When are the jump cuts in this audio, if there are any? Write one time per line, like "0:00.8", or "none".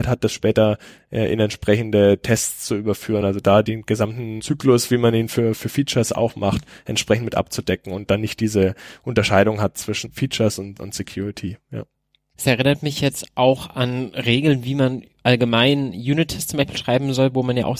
none